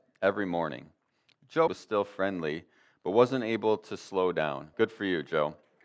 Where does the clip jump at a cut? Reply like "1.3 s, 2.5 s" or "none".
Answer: 1.7 s, 4.7 s